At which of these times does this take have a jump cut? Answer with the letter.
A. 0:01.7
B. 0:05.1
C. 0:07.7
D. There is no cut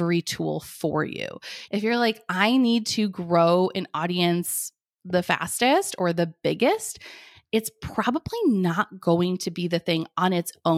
A